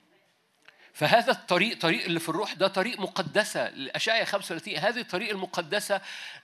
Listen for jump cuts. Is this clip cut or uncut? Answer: cut